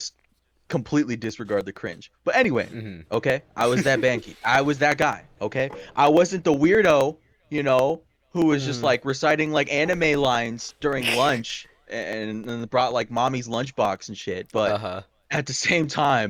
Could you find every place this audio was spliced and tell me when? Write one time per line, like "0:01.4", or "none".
0:03.1